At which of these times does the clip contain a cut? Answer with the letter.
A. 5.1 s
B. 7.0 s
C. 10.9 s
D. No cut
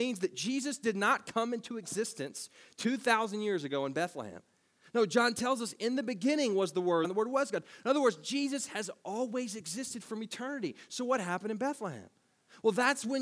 B